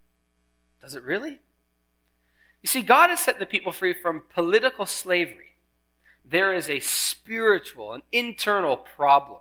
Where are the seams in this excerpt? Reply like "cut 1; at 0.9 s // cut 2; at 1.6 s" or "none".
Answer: cut 1; at 6.2 s